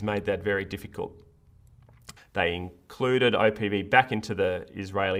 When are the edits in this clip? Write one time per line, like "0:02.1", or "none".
0:02.2

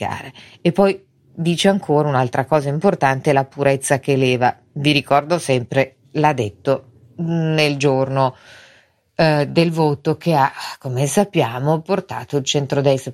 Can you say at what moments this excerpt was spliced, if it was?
none

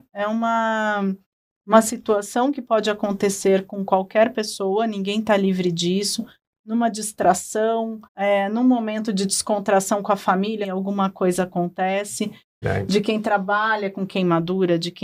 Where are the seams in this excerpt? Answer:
0:08.0
0:10.6
0:12.6

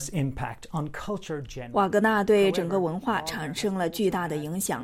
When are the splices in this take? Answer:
none

